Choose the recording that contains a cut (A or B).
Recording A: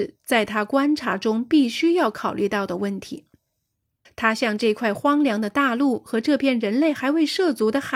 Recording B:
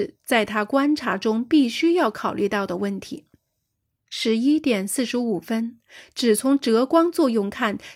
A